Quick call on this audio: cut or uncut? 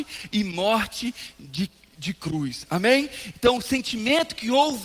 uncut